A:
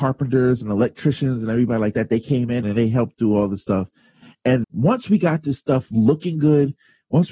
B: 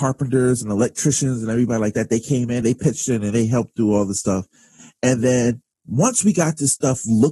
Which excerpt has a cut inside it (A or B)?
A